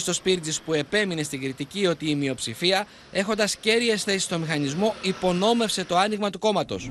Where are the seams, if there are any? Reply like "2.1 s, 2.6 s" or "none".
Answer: none